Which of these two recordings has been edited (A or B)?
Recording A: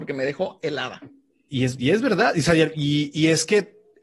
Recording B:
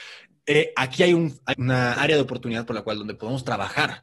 B